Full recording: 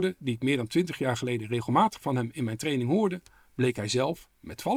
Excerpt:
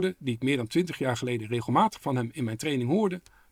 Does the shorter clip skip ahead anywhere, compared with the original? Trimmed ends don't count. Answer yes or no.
no